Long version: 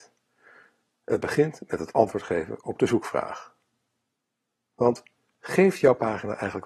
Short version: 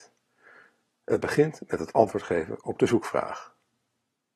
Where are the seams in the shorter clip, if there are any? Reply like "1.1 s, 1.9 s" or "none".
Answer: none